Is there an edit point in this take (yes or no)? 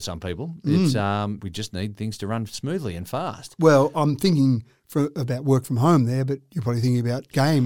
yes